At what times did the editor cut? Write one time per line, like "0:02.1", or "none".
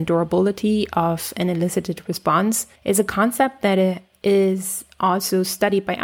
0:02.8